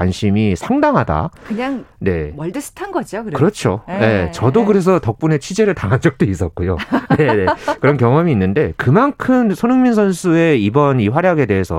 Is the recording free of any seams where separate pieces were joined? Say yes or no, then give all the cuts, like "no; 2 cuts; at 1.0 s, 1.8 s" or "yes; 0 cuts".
yes; 0 cuts